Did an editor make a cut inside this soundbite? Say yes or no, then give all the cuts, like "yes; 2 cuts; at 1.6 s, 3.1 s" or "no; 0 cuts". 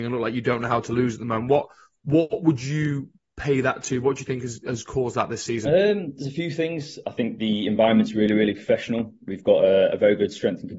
no; 0 cuts